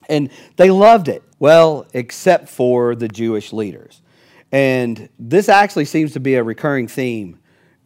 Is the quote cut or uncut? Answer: cut